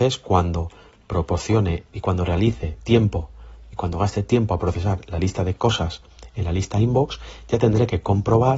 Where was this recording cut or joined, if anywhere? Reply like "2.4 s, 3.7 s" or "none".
1.9 s